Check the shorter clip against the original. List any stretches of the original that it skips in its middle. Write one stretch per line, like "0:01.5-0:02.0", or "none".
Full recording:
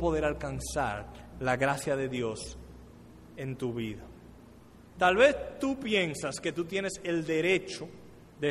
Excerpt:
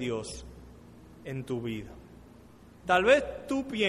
none

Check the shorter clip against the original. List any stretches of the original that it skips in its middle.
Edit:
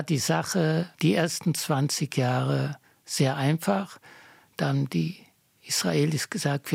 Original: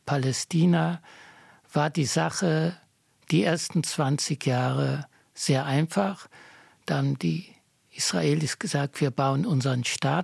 0:02.8-0:03.2

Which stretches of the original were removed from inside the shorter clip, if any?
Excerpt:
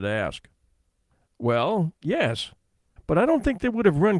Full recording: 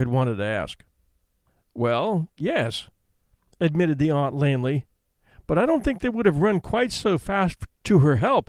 0:03.3-0:05.4

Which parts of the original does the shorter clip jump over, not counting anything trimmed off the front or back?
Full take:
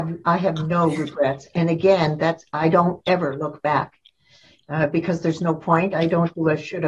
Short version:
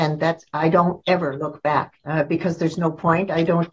0:04.0-0:04.6

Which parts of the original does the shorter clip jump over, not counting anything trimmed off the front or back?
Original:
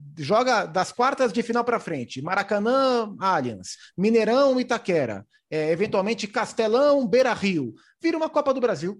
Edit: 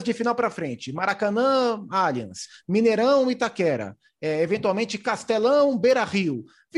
none

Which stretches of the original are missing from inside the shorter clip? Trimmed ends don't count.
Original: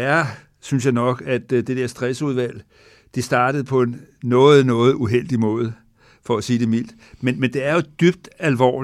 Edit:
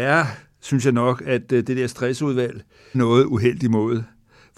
0:02.9-0:04.6

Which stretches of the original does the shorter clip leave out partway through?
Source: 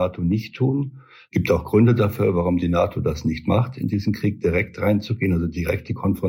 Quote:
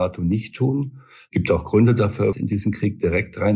0:02.3-0:03.7

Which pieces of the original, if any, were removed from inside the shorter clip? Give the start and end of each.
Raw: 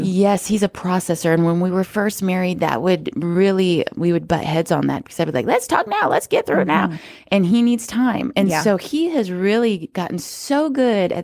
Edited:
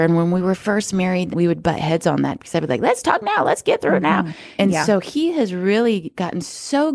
0:02.6-0:03.9
0:07.2-0:08.3

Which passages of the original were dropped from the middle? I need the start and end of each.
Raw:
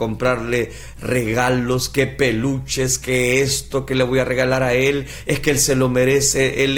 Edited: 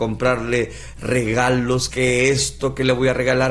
0:01.9-0:03.0

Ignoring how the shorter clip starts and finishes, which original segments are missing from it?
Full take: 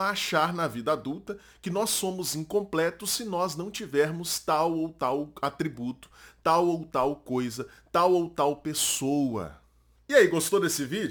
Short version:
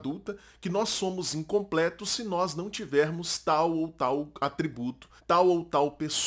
0:06.2-0:07.8

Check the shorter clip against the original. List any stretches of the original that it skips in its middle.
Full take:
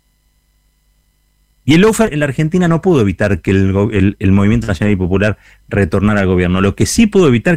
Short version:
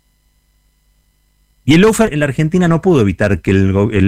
none

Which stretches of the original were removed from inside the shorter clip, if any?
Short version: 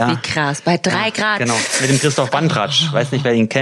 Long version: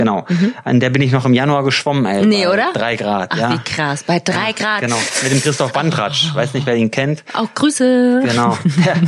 none

